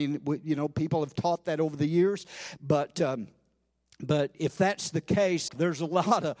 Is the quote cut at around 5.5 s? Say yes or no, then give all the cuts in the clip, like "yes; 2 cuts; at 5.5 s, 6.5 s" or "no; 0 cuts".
yes; 2 cuts; at 2.6 s, 5.5 s